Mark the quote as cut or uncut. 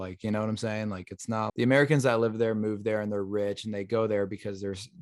cut